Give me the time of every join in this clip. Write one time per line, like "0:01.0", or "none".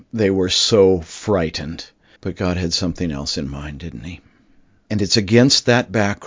0:02.2
0:04.9

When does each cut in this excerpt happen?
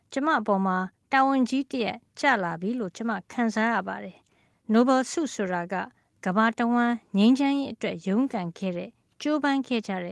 none

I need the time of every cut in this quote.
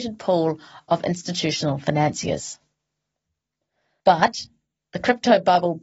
none

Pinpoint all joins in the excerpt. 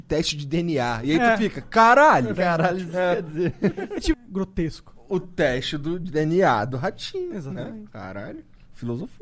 0:02.4
0:04.1

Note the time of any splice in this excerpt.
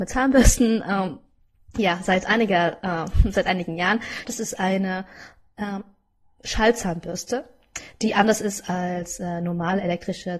0:04.2

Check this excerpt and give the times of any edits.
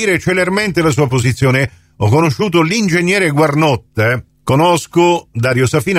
0:04.3

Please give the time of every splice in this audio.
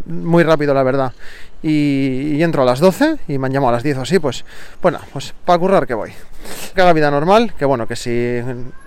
0:06.7

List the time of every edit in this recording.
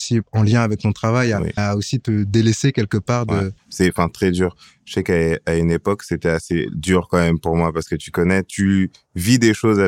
0:01.6
0:03.6

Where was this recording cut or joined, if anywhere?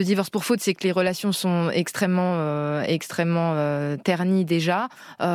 none

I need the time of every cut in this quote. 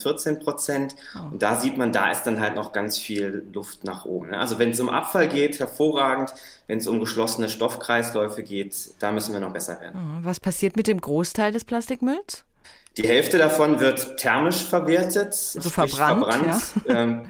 none

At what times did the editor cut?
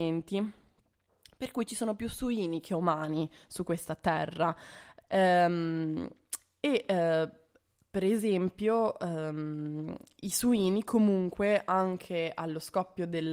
0:05.0

